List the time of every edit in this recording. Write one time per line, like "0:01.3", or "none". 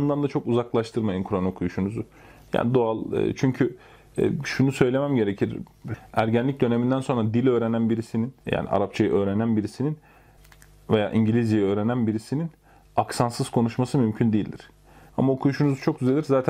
0:08.4
0:15.1